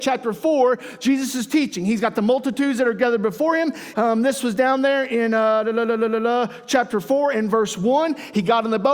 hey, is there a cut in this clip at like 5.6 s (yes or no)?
no